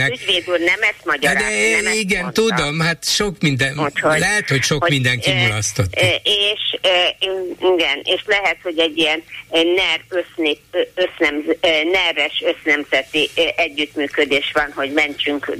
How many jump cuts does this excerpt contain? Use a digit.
0